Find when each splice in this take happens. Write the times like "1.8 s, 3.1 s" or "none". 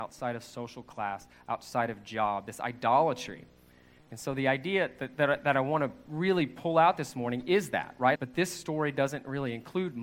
8.2 s